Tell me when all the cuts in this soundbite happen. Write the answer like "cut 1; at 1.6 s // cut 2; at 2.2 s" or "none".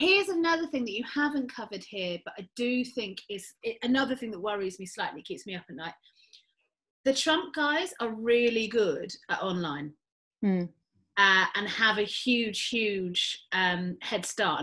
cut 1; at 3.5 s